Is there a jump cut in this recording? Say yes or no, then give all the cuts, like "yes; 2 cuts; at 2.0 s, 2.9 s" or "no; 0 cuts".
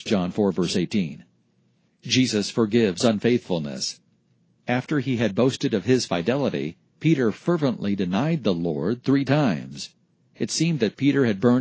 no; 0 cuts